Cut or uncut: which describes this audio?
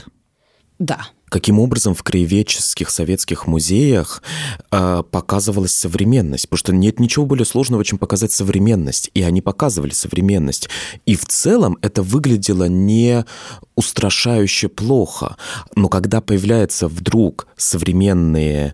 cut